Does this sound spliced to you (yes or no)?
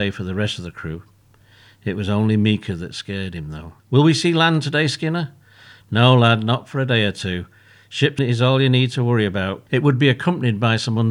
yes